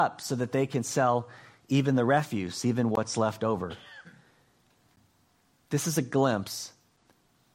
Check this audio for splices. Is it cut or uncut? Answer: uncut